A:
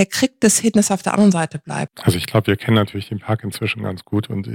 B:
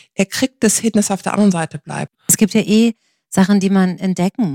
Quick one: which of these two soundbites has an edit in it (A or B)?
B